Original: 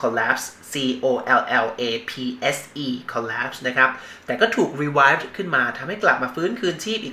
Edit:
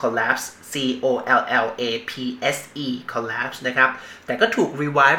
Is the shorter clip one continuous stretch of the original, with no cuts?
yes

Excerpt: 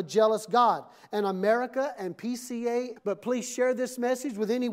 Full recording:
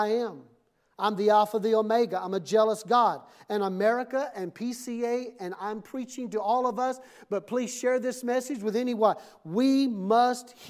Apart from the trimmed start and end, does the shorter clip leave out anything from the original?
yes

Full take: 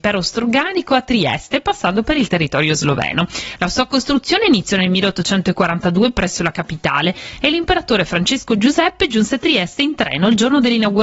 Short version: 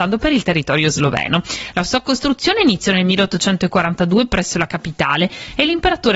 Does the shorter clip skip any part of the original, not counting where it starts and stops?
no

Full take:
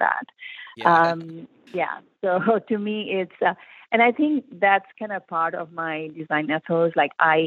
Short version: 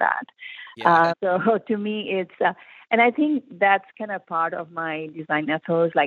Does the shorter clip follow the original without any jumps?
no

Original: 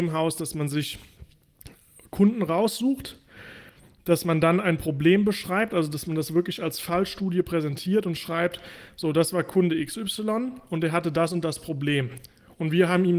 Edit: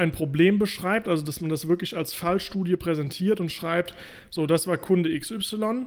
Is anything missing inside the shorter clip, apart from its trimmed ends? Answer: no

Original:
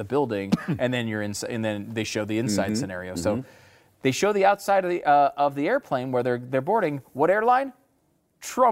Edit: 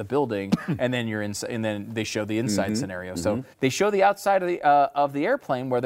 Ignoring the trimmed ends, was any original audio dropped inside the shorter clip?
yes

